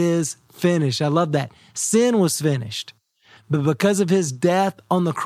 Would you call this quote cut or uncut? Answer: cut